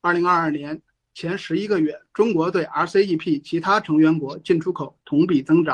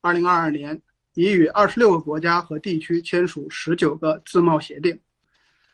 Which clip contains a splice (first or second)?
second